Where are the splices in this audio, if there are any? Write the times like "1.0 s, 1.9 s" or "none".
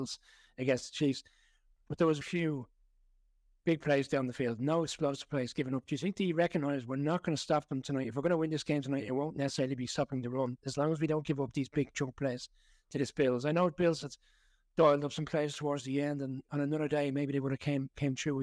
2.2 s